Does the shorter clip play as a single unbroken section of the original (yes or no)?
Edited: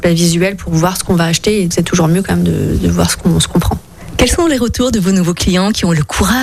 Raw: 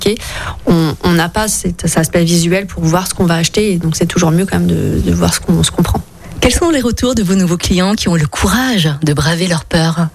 no